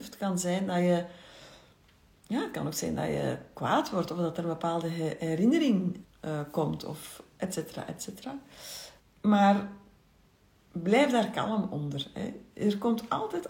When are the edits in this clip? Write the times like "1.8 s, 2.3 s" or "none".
6.0 s, 9.0 s